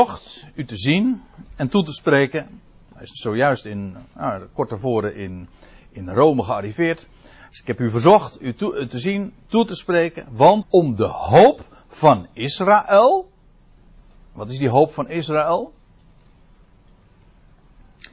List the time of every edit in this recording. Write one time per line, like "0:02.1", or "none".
0:10.6